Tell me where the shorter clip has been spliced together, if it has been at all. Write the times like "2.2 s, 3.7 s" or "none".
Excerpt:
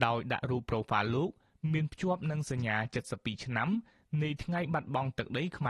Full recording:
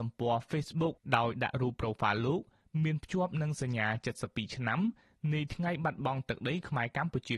none